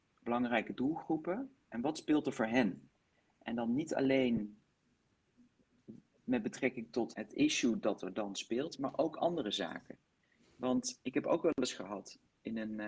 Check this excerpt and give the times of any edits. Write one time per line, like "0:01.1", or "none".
0:07.1
0:11.0